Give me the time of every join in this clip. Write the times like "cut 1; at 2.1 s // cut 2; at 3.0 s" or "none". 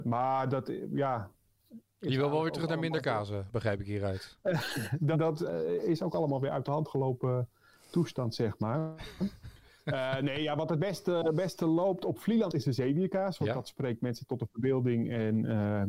cut 1; at 5.1 s